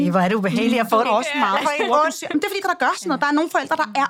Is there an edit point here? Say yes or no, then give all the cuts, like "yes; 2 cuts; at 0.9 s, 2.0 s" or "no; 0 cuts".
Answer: yes; 2 cuts; at 1.0 s, 2.6 s